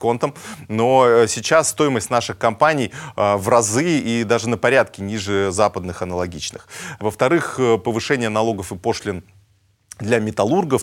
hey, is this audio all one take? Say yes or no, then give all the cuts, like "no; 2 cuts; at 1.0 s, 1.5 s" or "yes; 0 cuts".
no; 1 cut; at 7.0 s